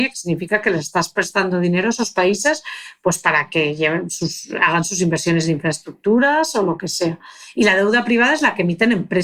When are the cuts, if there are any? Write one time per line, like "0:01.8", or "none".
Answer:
none

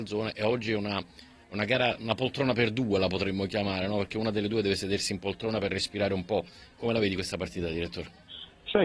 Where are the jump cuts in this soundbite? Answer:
none

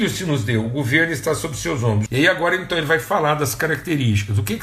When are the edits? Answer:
0:02.1

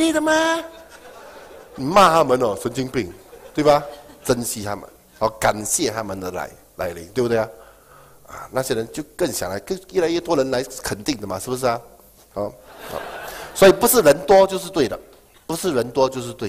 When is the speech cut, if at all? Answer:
none

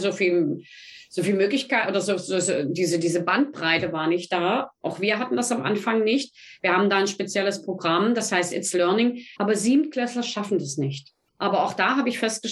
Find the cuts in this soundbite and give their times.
0:09.4
0:11.3

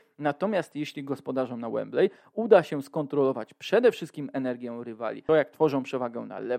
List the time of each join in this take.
0:05.3

